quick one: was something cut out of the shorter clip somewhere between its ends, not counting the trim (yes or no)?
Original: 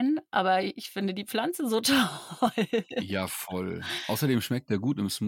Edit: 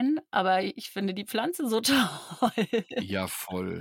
no